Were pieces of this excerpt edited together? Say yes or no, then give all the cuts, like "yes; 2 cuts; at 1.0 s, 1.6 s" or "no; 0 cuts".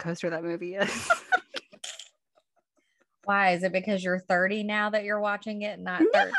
no; 0 cuts